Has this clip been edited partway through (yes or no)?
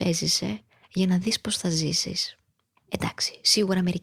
yes